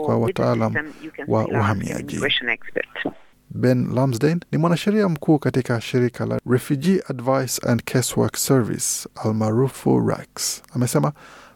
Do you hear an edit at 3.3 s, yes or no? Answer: yes